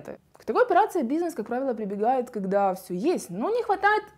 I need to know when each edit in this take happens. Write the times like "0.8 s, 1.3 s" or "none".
none

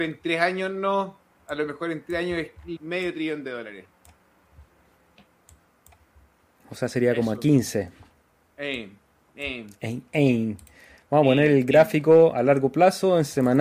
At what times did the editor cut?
2.8 s

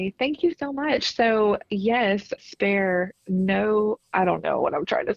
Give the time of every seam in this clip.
2.4 s

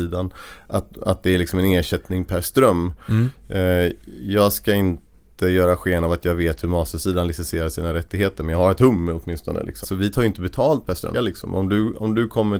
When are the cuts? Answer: 9.8 s, 11.1 s

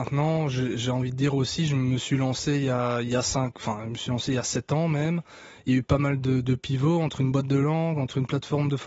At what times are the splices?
none

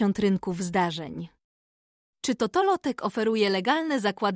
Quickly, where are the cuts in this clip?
2.1 s

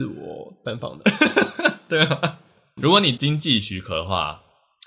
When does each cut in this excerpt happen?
2.8 s

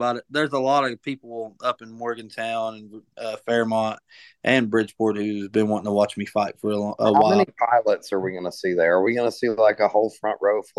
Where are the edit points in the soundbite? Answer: none

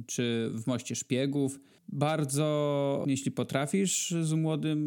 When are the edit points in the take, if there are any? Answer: 1.8 s, 3.0 s

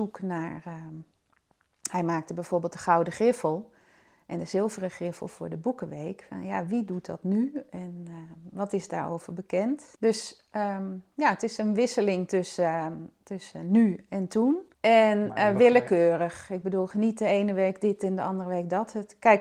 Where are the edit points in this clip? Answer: none

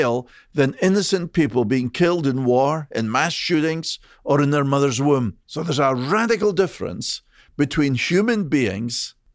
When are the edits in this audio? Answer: 5.4 s

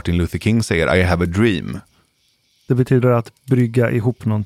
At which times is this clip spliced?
2.6 s

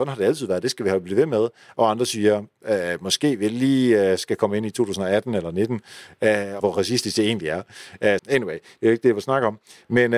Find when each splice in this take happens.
6.6 s, 8.2 s

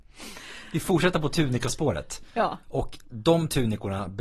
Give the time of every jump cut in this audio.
2.6 s

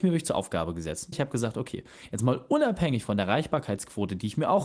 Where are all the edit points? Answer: 1.1 s

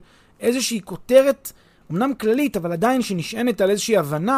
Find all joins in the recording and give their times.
none

